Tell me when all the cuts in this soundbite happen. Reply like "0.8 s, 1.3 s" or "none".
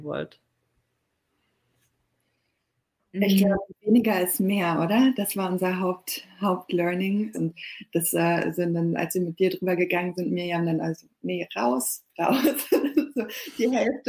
7.3 s

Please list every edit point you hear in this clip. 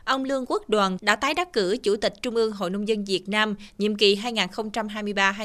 1.0 s

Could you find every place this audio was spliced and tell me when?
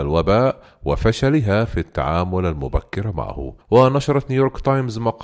3.6 s

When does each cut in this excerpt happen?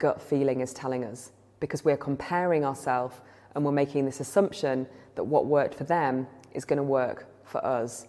none

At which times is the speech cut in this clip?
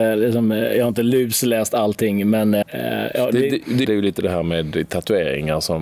2.6 s, 3.8 s

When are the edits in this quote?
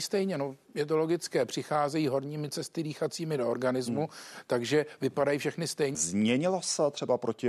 5.9 s

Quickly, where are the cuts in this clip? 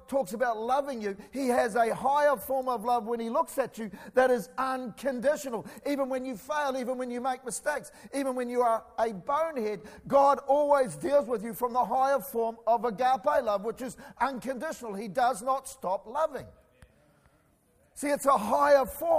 none

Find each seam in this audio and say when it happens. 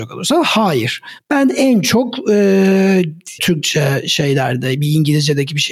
1.2 s, 3.4 s

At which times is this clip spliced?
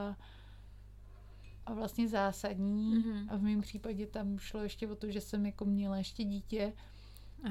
none

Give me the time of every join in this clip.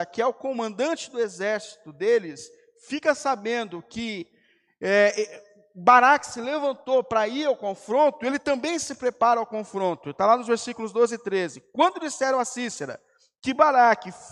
none

